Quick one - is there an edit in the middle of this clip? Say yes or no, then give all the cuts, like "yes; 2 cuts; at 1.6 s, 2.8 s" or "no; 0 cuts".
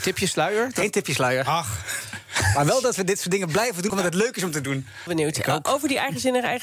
yes; 2 cuts; at 3.9 s, 5.1 s